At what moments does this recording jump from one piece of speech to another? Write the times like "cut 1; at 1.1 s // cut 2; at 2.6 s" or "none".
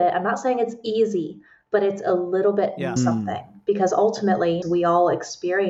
cut 1; at 3.0 s // cut 2; at 4.6 s